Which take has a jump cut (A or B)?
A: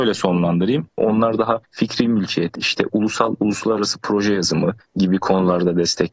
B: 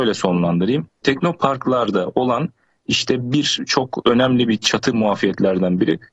A